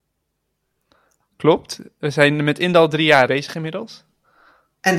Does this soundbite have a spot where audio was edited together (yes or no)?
yes